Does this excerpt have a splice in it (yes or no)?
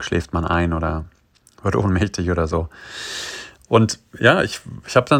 no